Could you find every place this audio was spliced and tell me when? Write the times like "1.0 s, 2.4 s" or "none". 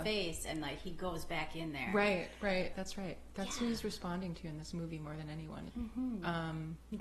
2.7 s, 5.7 s